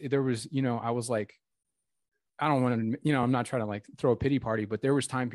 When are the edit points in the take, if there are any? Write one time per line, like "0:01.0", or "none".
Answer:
none

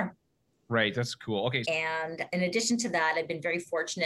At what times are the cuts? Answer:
0:01.6

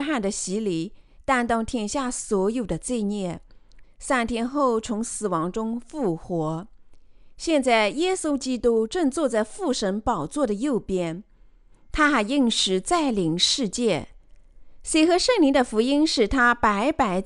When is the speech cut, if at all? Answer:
0:03.8

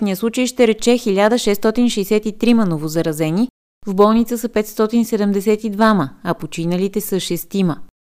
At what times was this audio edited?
none

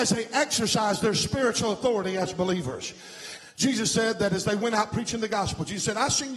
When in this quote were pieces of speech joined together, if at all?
0:03.4

